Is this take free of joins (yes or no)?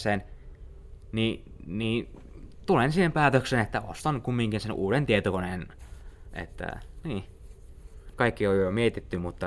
no